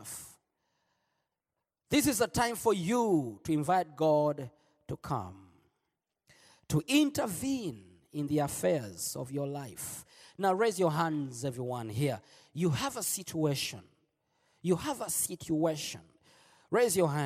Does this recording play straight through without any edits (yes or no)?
yes